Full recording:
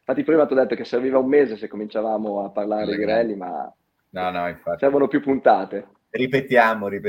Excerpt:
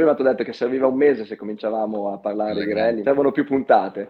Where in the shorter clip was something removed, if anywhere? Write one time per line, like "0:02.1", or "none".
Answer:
0:03.0

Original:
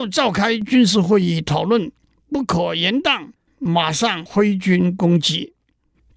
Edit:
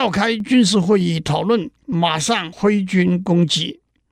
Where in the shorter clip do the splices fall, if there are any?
0:01.8

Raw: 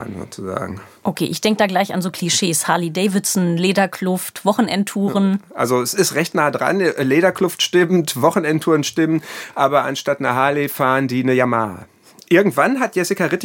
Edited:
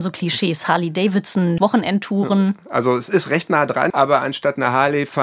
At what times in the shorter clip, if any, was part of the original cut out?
0:01.6
0:03.9

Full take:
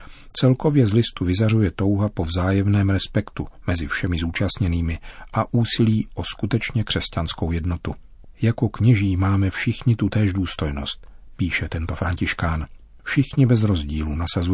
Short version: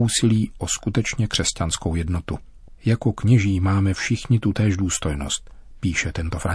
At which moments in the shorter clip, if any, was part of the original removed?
none

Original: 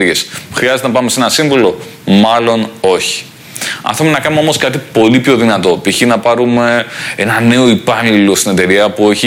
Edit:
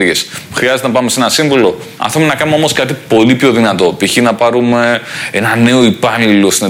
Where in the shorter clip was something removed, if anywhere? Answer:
0:02.0

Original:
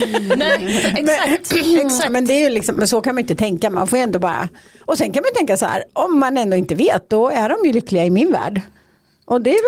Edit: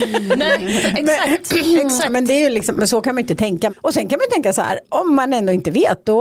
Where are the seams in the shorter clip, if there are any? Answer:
0:03.7

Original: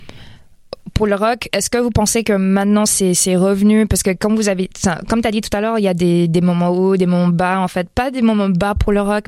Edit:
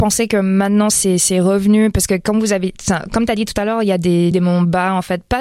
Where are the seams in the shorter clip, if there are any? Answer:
0:04.3

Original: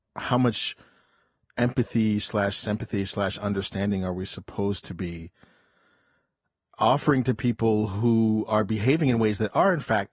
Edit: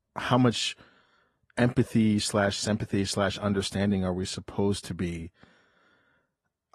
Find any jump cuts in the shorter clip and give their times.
none

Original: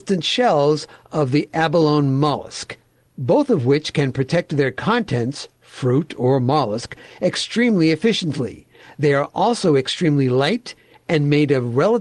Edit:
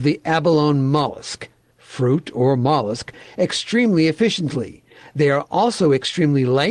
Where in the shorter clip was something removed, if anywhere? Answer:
0:01.7

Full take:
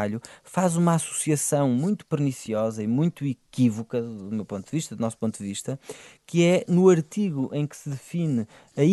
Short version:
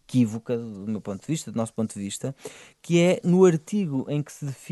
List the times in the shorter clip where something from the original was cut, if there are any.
none

